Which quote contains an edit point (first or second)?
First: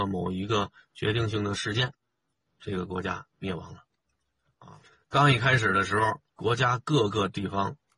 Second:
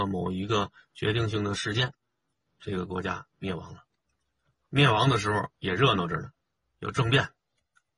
first